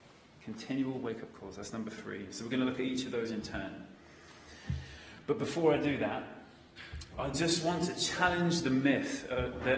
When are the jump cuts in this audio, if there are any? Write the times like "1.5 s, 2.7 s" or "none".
none